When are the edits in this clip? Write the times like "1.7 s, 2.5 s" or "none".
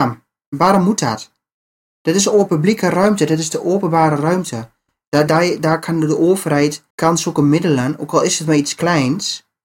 5.3 s, 6.9 s